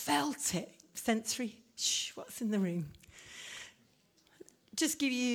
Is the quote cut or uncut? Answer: uncut